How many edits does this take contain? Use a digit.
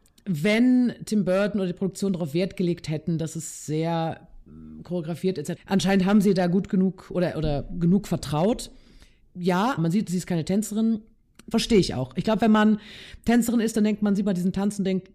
3